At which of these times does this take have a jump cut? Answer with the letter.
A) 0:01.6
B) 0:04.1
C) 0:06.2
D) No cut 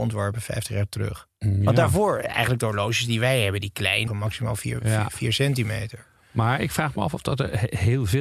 B